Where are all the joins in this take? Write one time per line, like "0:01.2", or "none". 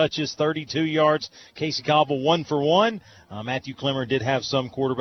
0:01.4